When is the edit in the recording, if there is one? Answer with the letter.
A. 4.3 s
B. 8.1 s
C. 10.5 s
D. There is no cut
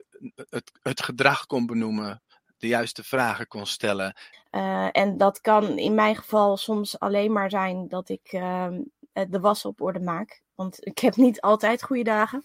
A